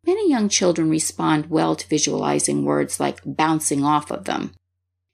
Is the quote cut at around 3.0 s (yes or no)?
no